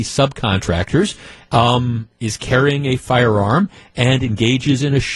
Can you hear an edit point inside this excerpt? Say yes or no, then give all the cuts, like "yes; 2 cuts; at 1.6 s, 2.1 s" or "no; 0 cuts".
no; 0 cuts